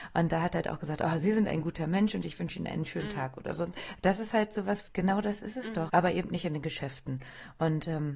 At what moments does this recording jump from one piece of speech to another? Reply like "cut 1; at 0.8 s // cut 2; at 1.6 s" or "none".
cut 1; at 4.9 s // cut 2; at 5.9 s